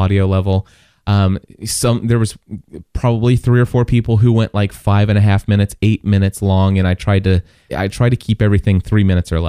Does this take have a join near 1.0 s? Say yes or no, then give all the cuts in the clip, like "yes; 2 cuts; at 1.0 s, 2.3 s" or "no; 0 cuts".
no; 1 cut; at 7.7 s